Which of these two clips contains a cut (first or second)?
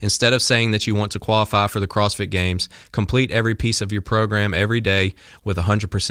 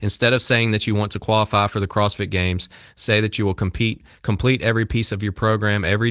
first